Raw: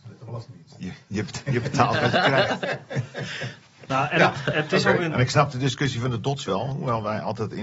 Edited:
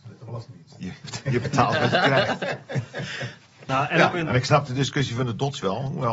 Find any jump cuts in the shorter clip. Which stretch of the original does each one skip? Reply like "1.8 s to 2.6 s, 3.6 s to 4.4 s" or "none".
1.0 s to 1.2 s, 4.3 s to 5.0 s